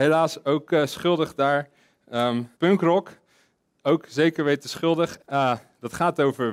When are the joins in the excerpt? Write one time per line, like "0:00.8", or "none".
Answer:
0:02.5
0:05.2